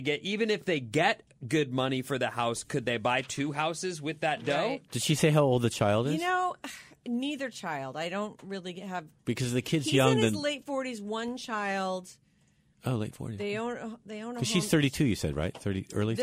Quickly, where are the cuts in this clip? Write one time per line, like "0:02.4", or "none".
0:09.2